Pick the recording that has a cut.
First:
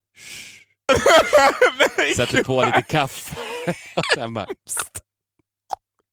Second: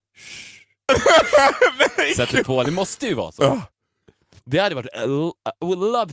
second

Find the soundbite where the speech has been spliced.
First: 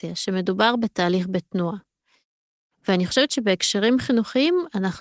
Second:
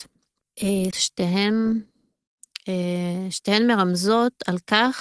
second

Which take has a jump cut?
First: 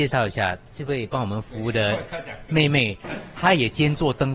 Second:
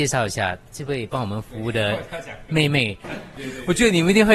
second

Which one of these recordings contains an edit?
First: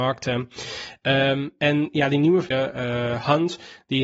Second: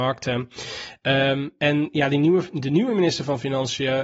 first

